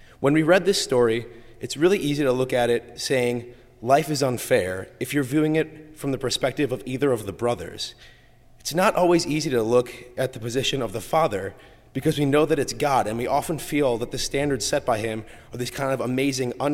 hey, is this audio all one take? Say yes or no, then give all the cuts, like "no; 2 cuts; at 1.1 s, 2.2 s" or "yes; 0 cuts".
yes; 0 cuts